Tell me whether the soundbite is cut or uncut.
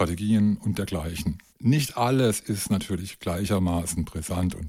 uncut